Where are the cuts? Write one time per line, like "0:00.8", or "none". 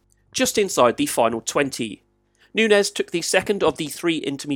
0:02.4